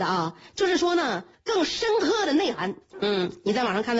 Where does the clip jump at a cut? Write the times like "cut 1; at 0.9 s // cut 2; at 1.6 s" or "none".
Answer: cut 1; at 1.3 s // cut 2; at 2.9 s

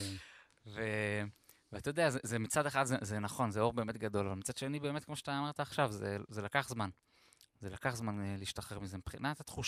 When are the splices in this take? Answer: none

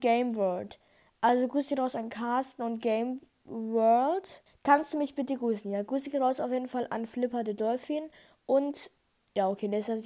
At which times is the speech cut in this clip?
cut 1; at 4.5 s

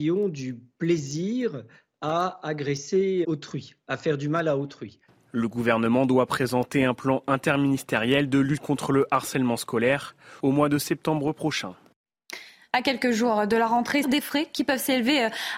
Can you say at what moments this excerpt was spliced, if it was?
cut 1; at 3.2 s // cut 2; at 14.0 s

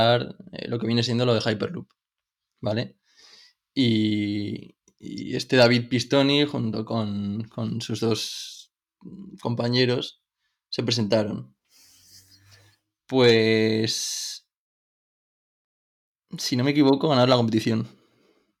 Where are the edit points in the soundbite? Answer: none

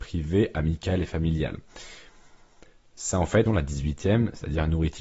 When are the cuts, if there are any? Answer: cut 1; at 3.5 s

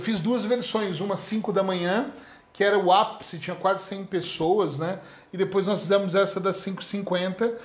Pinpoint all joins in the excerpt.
none

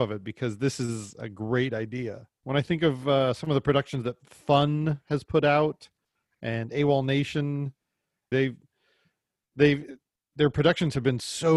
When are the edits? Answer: cut 1; at 2.4 s // cut 2; at 8.3 s

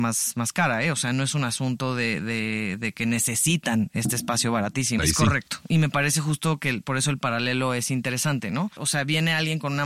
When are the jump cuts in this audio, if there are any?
cut 1; at 5.0 s // cut 2; at 8.8 s

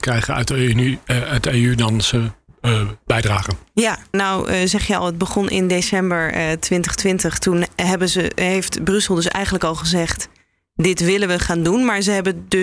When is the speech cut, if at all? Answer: cut 1; at 4.1 s

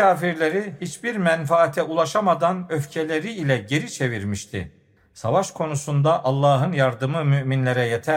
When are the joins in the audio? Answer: none

